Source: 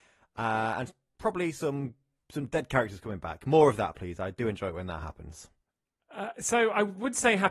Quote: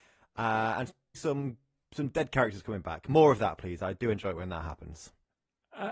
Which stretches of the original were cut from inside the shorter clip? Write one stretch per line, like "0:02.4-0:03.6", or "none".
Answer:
0:01.1-0:01.5